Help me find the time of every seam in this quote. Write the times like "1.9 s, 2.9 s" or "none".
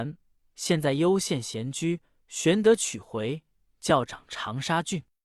none